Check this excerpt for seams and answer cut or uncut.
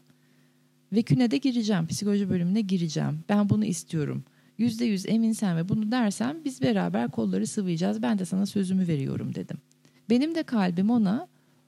cut